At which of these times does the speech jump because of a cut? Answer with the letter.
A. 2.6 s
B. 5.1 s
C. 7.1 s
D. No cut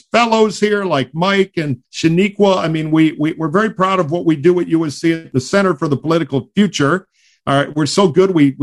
D